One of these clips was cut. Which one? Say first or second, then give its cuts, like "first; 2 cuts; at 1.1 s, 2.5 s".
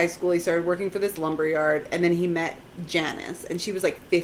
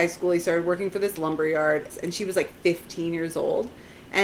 second; 1 cut; at 1.9 s